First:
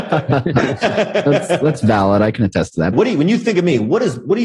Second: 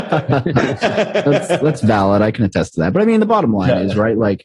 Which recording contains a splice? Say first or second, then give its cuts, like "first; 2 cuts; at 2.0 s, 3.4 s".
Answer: first; 1 cut; at 2.9 s